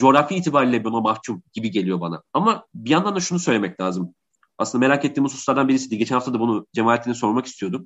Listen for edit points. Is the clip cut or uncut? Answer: uncut